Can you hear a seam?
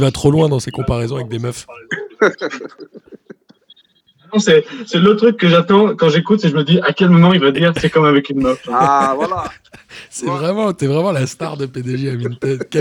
no; 0 cuts

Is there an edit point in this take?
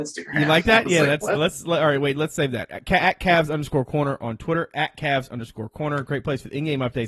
yes; 1 cut; at 1.4 s

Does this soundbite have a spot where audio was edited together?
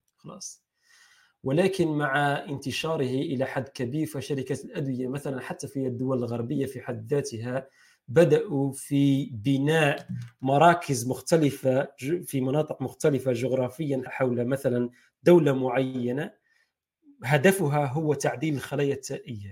yes; 1 cut; at 14.1 s

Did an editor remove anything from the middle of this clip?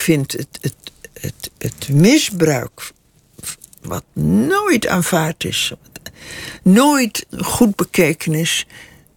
yes; 2 cuts; at 3.8 s, 7.3 s

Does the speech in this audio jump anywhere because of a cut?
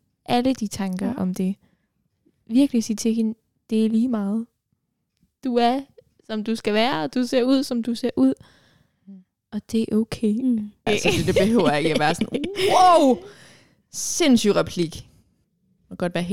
yes; 1 cut; at 10.9 s

